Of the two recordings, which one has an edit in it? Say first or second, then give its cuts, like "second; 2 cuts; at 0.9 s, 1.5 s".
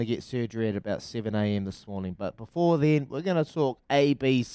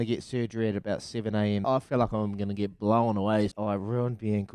second; 2 cuts; at 1.6 s, 3.5 s